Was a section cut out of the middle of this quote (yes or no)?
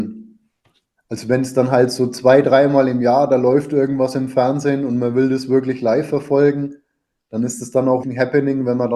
yes